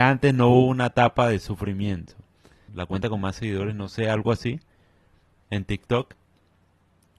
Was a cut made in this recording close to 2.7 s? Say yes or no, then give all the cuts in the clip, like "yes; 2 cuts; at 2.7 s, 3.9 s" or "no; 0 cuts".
yes; 1 cut; at 2.7 s